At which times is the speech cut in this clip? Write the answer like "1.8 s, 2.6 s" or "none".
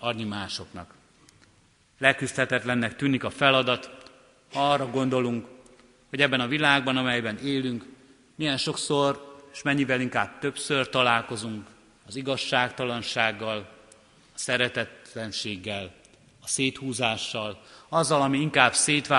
none